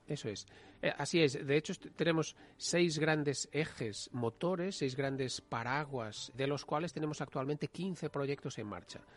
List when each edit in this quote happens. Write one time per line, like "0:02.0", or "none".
0:06.3